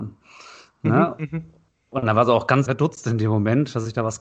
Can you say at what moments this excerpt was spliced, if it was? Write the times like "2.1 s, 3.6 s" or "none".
2.7 s